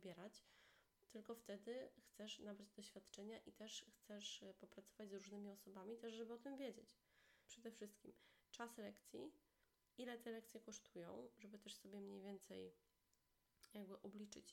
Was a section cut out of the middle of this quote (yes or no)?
yes